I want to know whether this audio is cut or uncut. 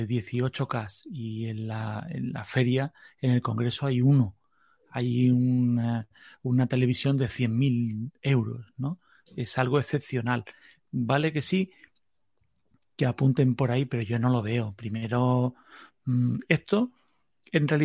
uncut